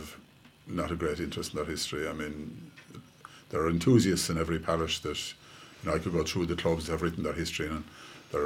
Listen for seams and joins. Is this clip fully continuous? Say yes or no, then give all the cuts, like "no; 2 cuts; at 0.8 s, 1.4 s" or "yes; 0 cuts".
yes; 0 cuts